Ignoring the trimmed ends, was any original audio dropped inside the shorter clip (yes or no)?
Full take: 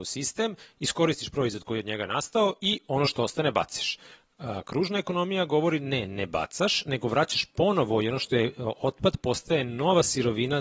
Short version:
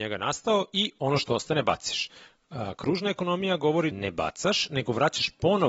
yes